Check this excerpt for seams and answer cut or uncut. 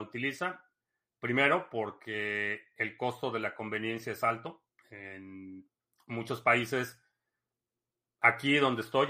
uncut